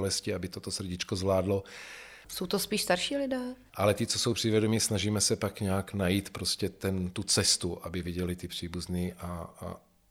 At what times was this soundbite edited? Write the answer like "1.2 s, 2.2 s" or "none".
2.2 s, 3.7 s